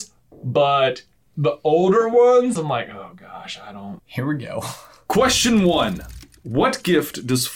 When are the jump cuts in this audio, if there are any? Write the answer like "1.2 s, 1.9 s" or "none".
2.6 s, 4.0 s